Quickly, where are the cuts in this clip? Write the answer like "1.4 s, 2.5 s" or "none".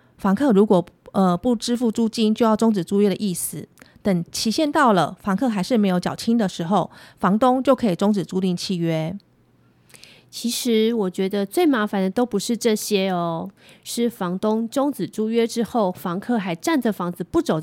none